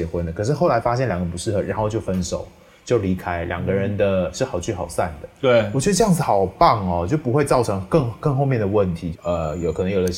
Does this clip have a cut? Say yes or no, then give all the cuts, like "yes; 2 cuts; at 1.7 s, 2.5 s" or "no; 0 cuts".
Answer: yes; 1 cut; at 9.1 s